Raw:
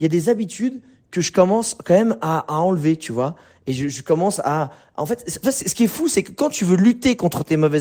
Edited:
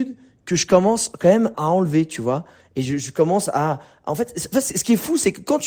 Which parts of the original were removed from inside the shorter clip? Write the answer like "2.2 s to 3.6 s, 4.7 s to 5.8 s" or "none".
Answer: 2.2 s to 2.5 s

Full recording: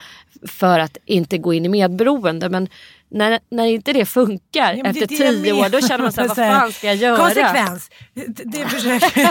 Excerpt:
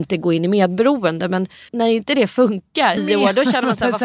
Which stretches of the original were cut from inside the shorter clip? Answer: 2.9 s to 3.5 s, 4.8 s to 5.3 s

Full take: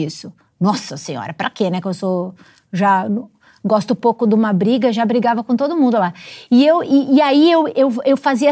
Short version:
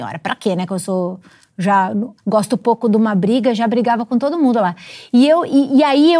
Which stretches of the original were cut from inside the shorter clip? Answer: 3.3 s to 3.6 s

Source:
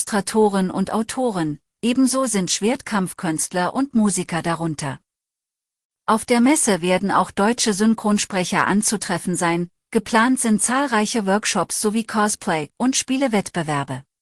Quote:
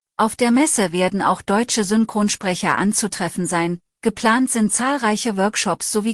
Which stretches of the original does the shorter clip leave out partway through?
none

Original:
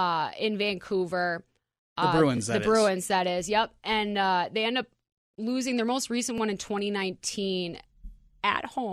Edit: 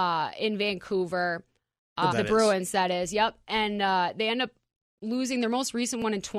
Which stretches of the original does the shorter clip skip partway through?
2.1 s to 2.5 s

